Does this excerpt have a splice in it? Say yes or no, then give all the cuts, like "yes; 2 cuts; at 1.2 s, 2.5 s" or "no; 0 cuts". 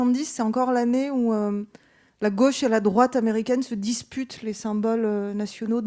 no; 0 cuts